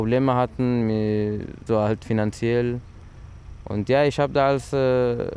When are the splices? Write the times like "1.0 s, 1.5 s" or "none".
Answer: 1.7 s